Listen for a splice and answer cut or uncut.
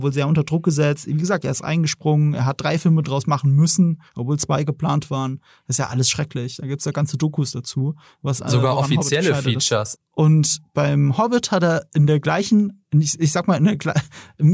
cut